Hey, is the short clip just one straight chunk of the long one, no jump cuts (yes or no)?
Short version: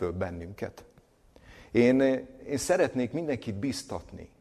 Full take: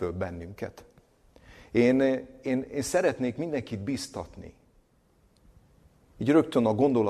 no